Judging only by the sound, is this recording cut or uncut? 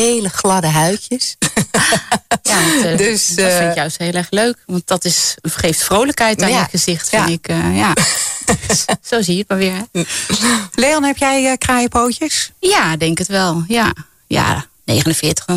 uncut